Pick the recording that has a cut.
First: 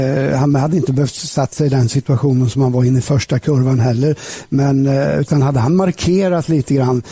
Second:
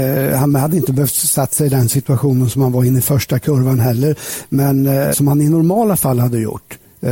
second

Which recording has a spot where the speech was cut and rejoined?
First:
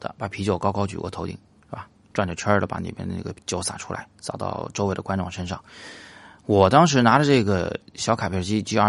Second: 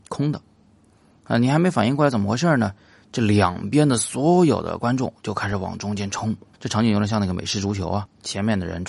second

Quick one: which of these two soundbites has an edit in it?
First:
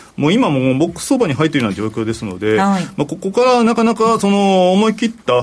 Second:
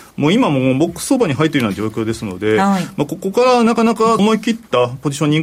second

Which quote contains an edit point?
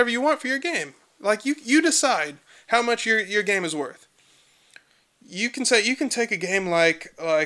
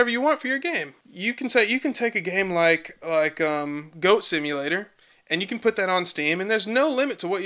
second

